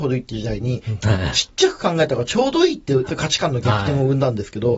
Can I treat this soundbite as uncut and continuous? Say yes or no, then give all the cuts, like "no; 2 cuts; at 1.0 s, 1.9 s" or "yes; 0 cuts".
no; 2 cuts; at 1.0 s, 3.1 s